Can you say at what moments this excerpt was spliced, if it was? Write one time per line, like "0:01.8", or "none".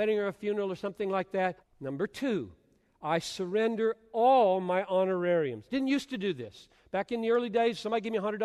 0:01.6